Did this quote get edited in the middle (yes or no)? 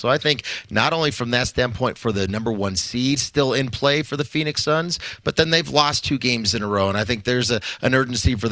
no